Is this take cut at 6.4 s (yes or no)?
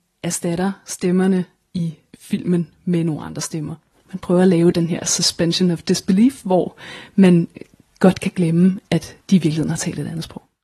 no